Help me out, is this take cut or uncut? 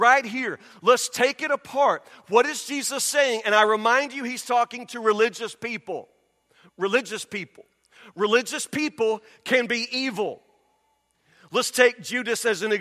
uncut